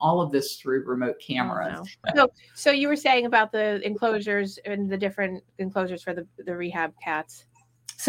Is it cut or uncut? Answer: cut